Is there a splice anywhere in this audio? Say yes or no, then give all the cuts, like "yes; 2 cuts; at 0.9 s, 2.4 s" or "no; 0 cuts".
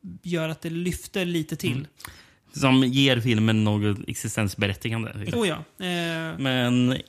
yes; 1 cut; at 5.3 s